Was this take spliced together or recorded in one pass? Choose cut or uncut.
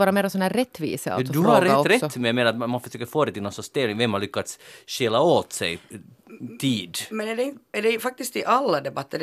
uncut